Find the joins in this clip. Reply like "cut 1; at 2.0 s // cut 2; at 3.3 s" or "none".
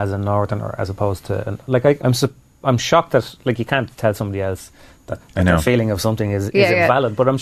cut 1; at 2.0 s // cut 2; at 5.2 s